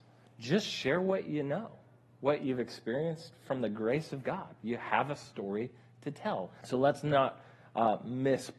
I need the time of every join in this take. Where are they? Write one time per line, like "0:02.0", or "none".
0:06.6

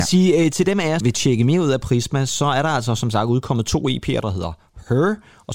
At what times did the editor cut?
0:01.0
0:04.2

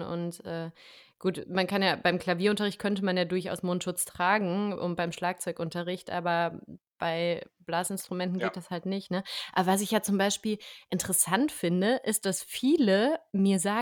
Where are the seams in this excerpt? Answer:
none

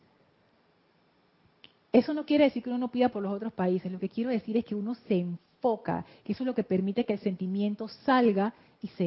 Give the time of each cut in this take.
none

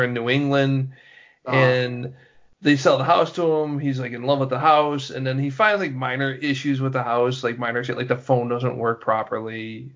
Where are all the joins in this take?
none

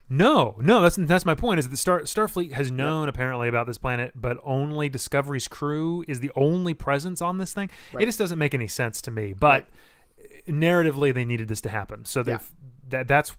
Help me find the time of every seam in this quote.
none

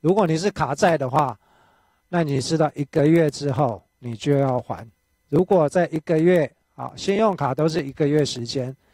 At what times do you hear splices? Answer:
none

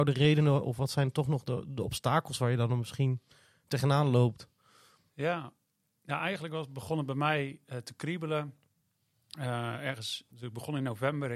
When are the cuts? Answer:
0:10.3

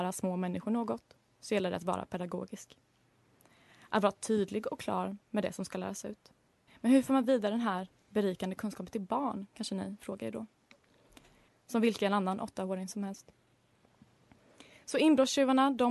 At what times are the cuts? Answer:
0:06.7
0:11.5

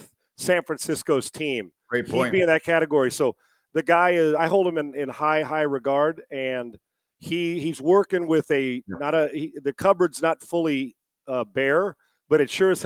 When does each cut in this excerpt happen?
0:04.4

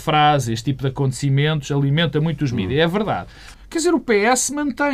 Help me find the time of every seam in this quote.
0:03.5

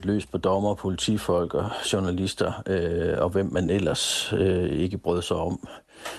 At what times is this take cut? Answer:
none

